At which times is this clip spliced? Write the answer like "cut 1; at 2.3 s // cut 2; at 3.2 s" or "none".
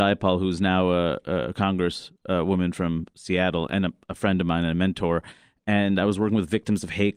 none